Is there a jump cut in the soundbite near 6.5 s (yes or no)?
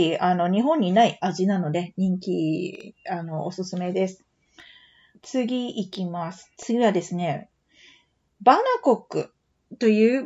yes